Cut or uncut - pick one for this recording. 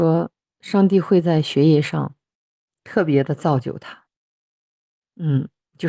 uncut